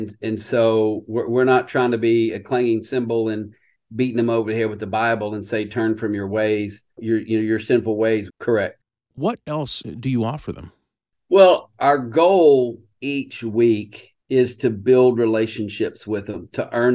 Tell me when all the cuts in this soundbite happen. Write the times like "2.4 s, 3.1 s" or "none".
7.0 s, 8.3 s